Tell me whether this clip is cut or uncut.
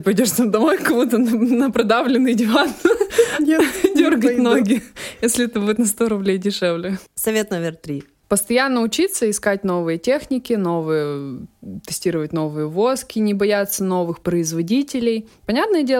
uncut